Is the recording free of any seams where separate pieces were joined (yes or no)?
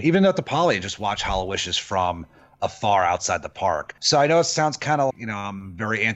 no